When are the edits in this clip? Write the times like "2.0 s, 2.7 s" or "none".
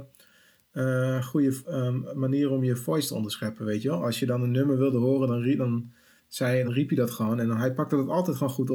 6.6 s